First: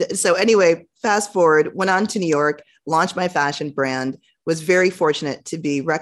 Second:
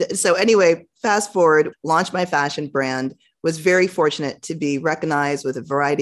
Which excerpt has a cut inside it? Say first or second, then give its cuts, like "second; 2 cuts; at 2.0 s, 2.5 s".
second; 1 cut; at 1.7 s